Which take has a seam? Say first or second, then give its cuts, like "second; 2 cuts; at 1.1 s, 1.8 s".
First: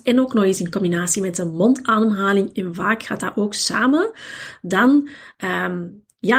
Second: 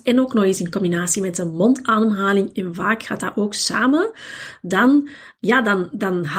second; 1 cut; at 5.3 s